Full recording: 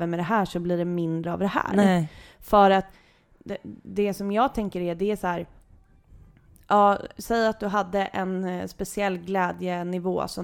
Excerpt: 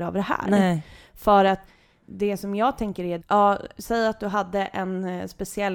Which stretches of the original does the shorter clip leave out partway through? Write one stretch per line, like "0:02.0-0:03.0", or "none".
0:03.3-0:03.8
0:05.0-0:06.6